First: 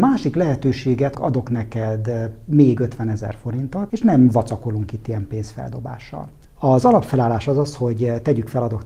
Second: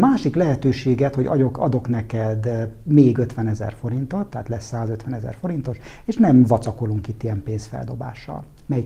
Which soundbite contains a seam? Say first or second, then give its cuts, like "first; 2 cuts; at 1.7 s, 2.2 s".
first; 3 cuts; at 1.1 s, 3.9 s, 6.4 s